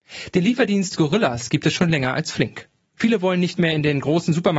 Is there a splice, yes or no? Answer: yes